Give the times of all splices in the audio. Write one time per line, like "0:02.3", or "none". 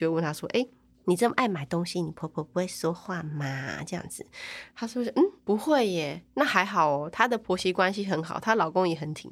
0:05.4